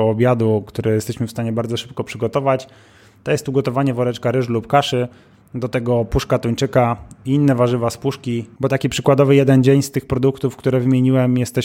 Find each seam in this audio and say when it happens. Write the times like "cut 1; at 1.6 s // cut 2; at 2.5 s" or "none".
cut 1; at 8.6 s